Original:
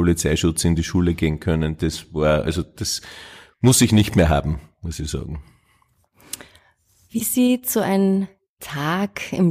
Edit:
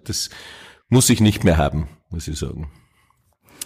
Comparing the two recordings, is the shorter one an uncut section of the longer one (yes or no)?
yes